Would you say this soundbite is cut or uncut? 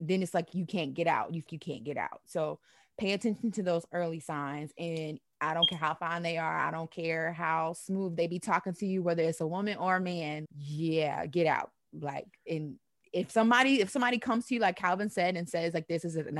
cut